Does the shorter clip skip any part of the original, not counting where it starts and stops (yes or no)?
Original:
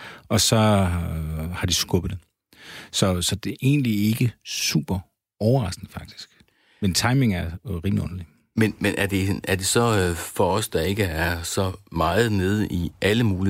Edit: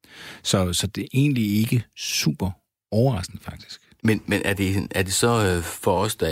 yes